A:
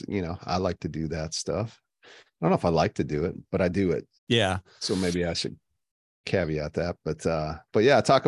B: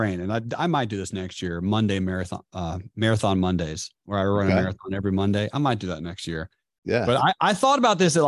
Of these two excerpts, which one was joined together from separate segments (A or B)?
A